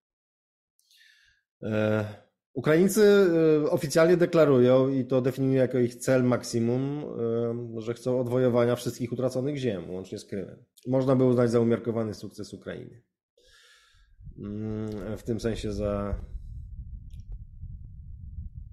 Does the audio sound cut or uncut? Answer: cut